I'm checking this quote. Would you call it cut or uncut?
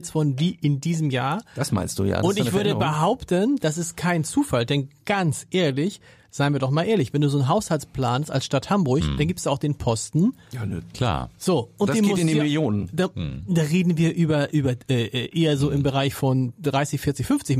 uncut